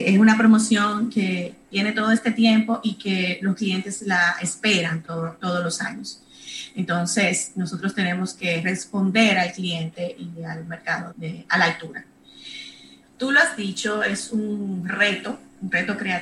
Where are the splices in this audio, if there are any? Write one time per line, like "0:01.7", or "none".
0:11.1
0:13.0